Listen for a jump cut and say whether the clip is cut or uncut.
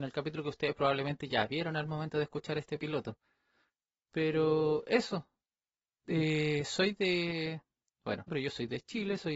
cut